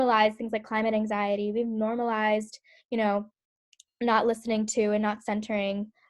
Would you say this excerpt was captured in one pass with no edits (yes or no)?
yes